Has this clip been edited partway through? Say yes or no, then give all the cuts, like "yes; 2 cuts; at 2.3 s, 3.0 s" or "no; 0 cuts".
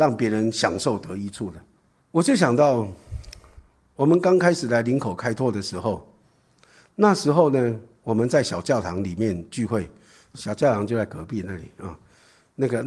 yes; 1 cut; at 2.0 s